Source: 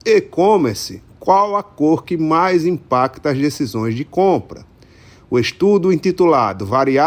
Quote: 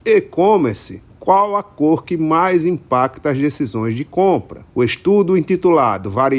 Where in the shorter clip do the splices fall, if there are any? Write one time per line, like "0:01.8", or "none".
0:04.7